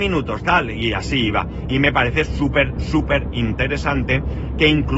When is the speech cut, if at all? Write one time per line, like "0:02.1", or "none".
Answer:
0:02.3